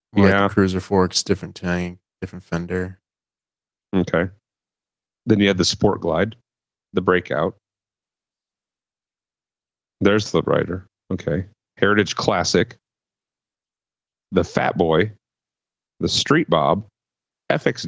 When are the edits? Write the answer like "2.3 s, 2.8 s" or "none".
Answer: 6.7 s